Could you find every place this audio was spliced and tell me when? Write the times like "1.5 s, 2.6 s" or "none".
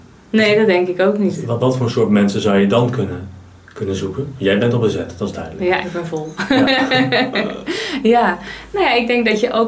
1.6 s